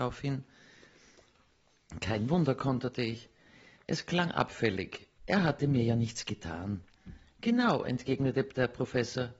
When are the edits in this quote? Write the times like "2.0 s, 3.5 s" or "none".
3.8 s, 5.2 s